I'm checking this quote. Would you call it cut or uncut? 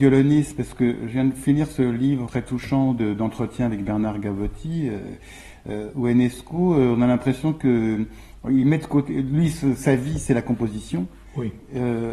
cut